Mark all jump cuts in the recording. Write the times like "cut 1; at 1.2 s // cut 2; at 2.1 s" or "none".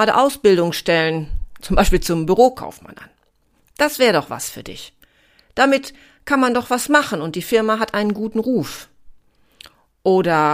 cut 1; at 1.6 s